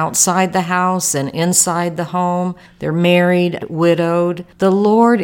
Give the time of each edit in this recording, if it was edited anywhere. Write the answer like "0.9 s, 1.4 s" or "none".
3.6 s